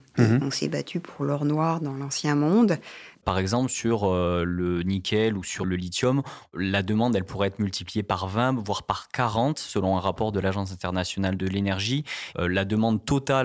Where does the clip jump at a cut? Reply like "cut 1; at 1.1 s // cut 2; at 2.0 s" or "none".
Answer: cut 1; at 3.1 s